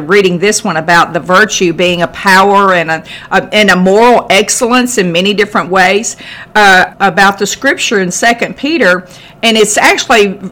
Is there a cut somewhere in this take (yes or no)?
yes